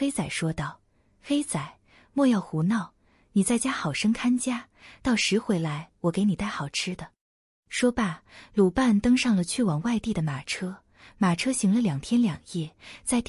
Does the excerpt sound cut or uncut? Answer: uncut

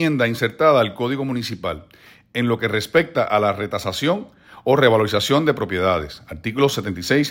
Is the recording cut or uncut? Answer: uncut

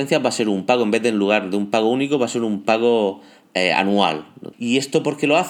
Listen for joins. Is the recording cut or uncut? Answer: cut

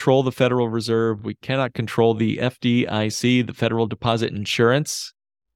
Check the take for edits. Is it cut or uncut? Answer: uncut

